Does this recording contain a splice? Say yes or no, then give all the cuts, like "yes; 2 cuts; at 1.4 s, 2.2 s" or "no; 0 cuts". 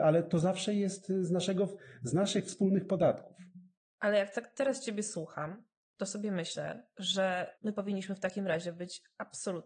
yes; 1 cut; at 7.6 s